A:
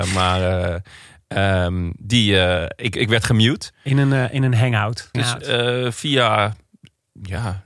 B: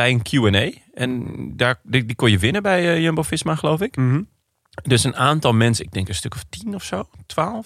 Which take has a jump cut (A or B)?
A